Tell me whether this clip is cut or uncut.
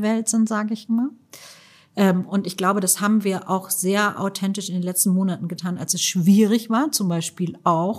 uncut